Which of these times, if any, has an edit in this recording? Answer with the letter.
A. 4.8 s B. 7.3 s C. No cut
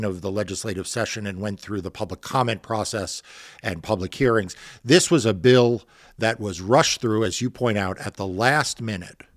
C